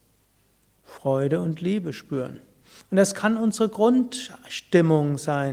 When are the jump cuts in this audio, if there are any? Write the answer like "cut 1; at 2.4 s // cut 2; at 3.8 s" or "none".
cut 1; at 2.8 s